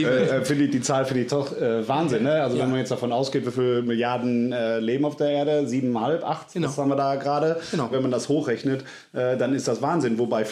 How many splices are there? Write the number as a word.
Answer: one